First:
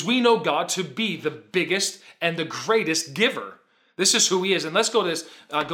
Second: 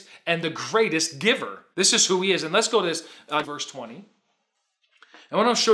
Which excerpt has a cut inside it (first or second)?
second